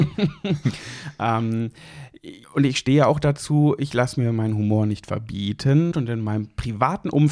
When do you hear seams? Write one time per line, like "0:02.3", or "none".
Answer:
0:02.4
0:05.9